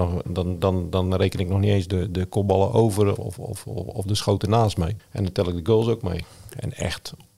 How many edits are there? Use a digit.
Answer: 2